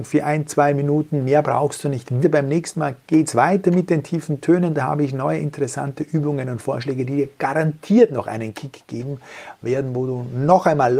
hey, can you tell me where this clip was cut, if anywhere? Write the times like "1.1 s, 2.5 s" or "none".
2.2 s

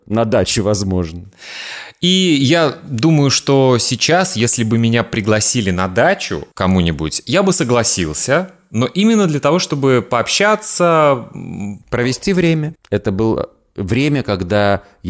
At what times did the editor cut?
6.5 s, 12.8 s

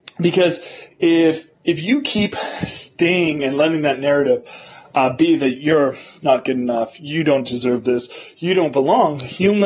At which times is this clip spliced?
none

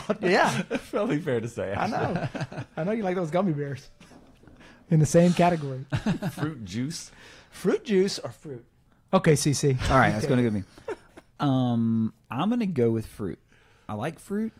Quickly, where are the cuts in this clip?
none

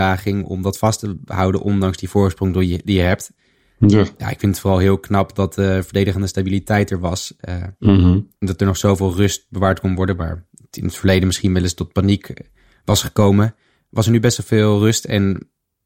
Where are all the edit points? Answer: none

